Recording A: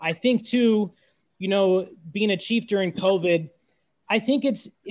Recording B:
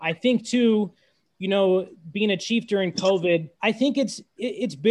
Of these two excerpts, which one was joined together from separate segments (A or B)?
B